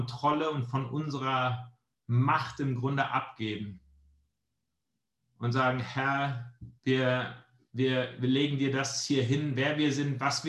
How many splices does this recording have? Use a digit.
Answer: 1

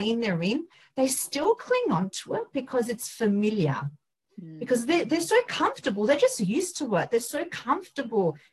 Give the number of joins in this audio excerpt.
0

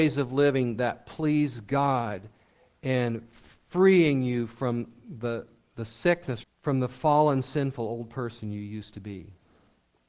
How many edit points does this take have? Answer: 1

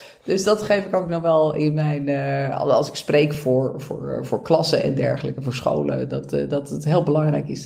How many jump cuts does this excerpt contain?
0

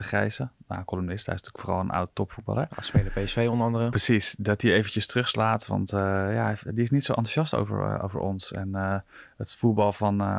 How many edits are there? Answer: 0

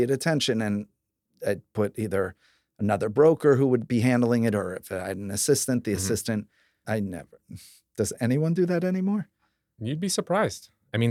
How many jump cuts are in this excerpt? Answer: 1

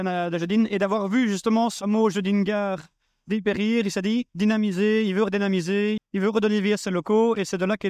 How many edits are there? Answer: 2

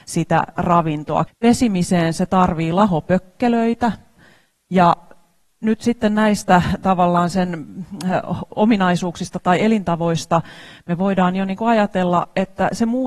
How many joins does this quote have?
1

